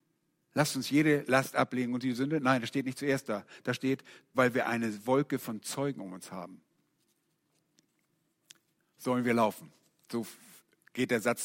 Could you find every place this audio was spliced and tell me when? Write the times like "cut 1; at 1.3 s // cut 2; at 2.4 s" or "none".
cut 1; at 4.3 s

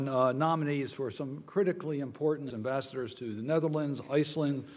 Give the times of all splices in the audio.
cut 1; at 2.5 s

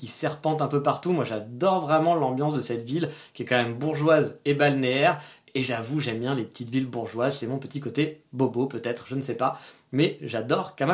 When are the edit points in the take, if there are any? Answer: none

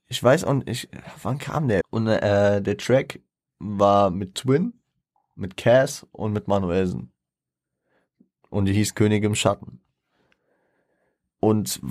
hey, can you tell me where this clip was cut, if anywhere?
cut 1; at 1.8 s

